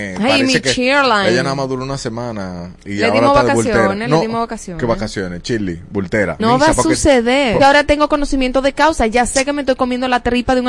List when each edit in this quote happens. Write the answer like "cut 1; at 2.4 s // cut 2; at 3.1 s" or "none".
cut 1; at 6.4 s // cut 2; at 7.6 s